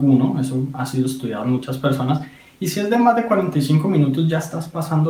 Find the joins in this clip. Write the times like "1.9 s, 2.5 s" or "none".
none